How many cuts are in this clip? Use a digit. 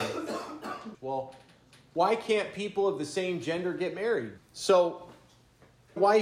2